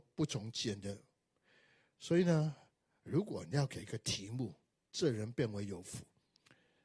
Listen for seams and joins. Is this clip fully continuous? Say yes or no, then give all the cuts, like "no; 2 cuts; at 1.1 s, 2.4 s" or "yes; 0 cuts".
yes; 0 cuts